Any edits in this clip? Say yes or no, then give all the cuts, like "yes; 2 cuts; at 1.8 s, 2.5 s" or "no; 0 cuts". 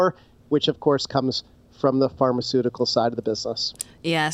no; 0 cuts